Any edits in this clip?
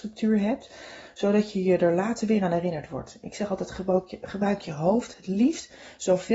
no; 0 cuts

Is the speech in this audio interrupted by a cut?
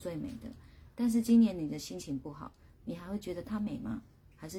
yes; 1 cut; at 2.7 s

